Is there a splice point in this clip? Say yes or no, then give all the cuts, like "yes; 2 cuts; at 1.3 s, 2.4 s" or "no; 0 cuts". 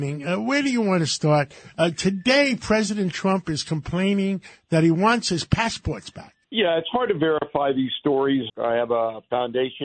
yes; 2 cuts; at 6.4 s, 8.5 s